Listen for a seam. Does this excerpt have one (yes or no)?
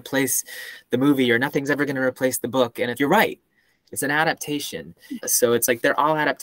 yes